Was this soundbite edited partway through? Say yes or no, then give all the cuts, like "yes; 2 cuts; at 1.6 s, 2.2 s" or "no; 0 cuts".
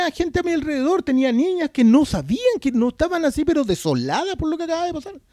no; 0 cuts